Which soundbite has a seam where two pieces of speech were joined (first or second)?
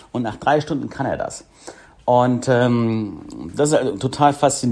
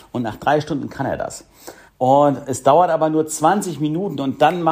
second